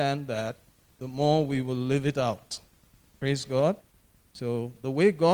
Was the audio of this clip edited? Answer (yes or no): no